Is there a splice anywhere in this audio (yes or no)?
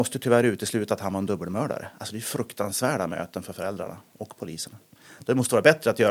no